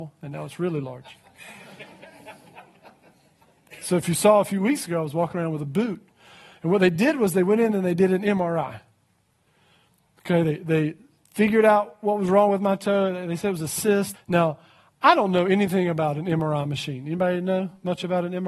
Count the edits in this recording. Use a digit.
1